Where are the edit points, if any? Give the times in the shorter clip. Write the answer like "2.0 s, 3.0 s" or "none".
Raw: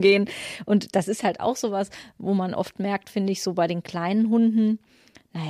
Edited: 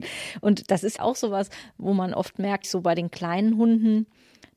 1.0 s, 2.6 s